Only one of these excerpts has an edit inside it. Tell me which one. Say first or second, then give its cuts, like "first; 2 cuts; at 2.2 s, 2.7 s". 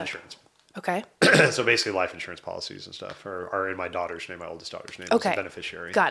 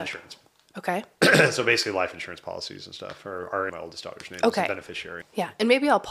second; 2 cuts; at 3.7 s, 5.2 s